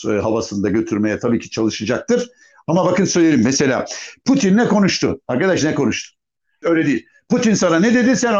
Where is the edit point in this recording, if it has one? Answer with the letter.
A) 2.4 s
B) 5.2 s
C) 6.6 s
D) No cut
C